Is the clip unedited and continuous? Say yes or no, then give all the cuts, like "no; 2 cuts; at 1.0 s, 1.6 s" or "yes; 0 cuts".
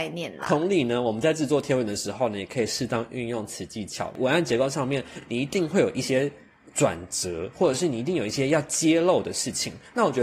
yes; 0 cuts